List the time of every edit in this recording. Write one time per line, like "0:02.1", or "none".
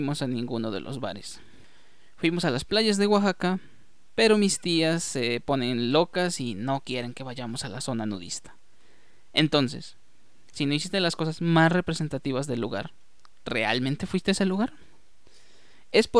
none